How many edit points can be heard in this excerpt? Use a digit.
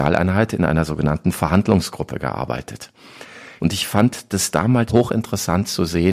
2